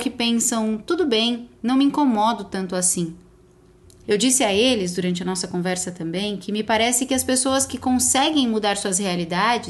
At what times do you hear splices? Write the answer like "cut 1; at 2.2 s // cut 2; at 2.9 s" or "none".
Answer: cut 1; at 4.0 s